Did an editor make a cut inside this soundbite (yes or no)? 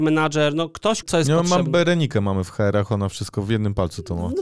yes